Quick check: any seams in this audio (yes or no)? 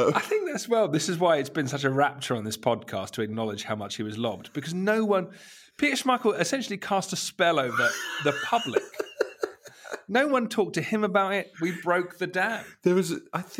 yes